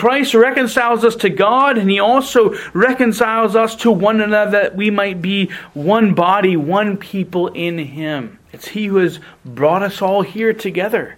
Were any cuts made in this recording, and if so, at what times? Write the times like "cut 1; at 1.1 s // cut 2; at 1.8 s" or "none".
cut 1; at 8.4 s